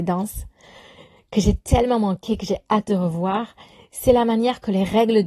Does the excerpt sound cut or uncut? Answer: uncut